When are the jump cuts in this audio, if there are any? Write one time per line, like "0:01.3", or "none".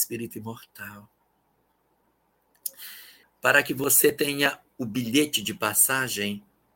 0:03.2